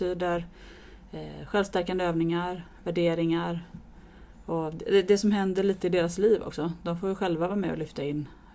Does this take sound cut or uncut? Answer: uncut